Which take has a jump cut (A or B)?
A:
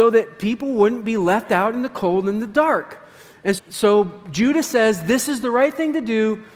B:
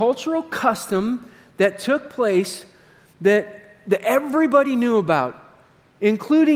A